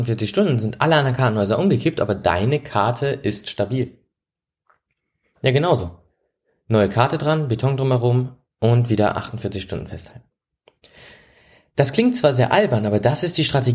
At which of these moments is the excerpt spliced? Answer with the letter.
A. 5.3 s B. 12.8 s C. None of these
A